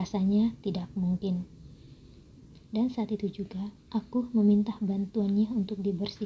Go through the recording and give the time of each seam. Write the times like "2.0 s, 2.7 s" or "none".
2.7 s, 3.8 s